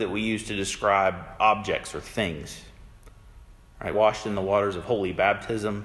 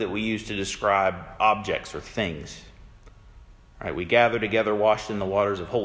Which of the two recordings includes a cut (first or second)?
first